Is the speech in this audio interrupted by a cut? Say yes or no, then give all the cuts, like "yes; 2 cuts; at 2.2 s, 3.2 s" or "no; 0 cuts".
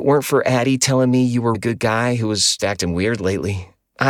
yes; 2 cuts; at 1.5 s, 2.6 s